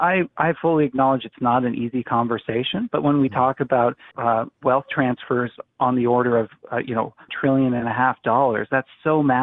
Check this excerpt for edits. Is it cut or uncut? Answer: cut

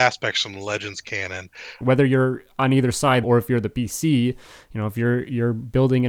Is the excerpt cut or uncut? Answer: cut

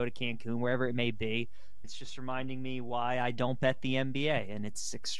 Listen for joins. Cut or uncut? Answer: cut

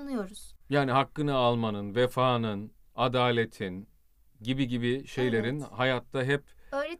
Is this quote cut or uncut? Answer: uncut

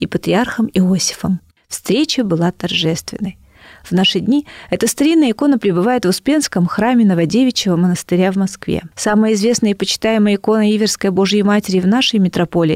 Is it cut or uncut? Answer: cut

